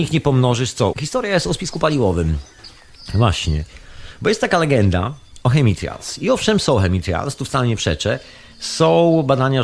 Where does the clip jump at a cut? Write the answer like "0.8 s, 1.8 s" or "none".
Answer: 0.9 s

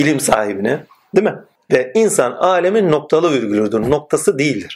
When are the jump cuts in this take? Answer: 1.6 s

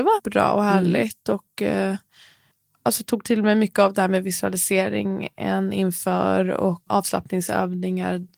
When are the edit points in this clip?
6.9 s

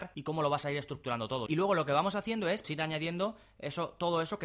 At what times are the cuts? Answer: 1.5 s, 2.6 s

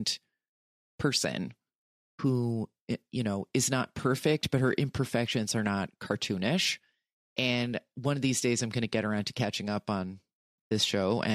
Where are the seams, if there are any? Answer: none

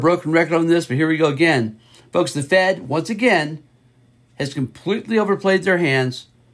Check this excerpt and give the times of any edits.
none

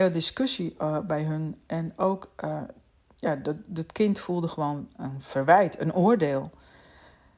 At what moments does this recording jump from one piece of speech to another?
none

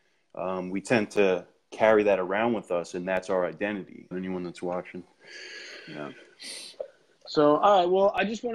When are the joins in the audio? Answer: 4.1 s

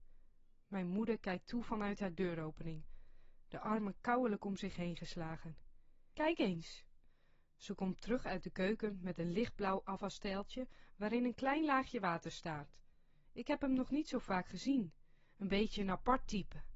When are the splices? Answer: 6.1 s, 13.3 s

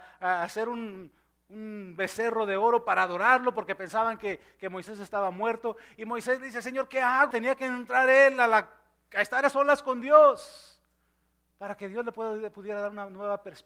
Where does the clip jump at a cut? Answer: 7.3 s

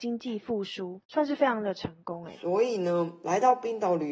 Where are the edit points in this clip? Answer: none

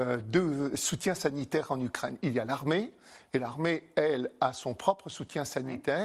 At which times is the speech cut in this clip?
none

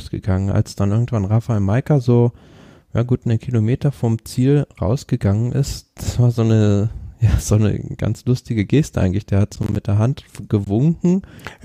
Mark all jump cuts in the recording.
none

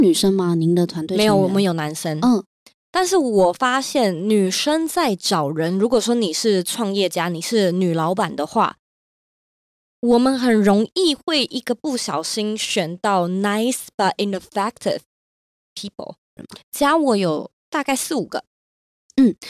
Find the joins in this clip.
16.4 s, 17.6 s

